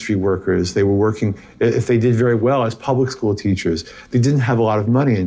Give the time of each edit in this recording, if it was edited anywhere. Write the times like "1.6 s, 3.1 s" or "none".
none